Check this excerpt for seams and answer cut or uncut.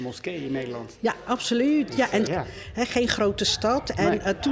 cut